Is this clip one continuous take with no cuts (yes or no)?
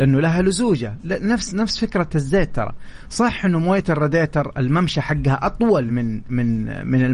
yes